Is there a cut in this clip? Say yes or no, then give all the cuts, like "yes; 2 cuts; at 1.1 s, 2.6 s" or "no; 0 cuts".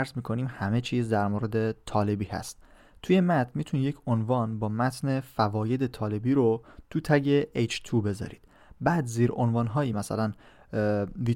yes; 1 cut; at 9.9 s